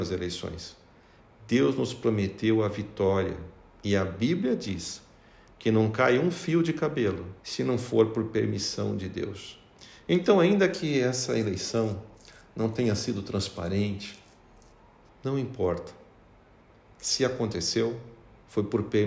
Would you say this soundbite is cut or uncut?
cut